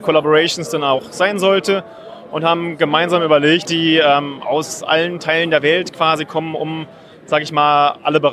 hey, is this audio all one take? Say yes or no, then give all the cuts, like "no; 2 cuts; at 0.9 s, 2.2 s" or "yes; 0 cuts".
no; 1 cut; at 3.6 s